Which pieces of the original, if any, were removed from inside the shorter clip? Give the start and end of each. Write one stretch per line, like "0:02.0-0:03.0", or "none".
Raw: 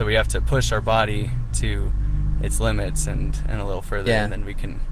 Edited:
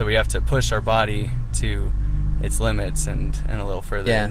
none